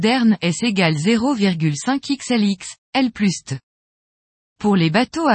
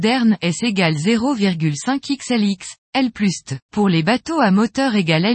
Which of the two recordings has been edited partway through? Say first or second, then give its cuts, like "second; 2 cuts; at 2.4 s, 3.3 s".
second; 1 cut; at 3.6 s